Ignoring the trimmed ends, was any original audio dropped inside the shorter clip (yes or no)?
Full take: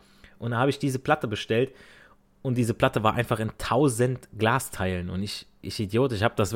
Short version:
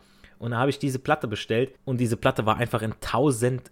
yes